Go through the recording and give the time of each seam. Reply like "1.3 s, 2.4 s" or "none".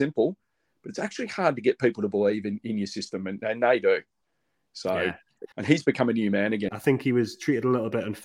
5.5 s, 6.7 s